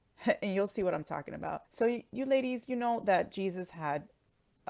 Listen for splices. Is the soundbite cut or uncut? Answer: cut